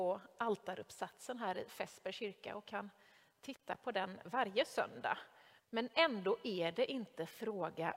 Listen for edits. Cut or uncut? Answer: cut